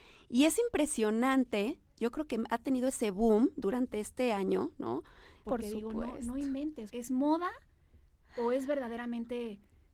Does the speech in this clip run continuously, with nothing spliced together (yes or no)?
no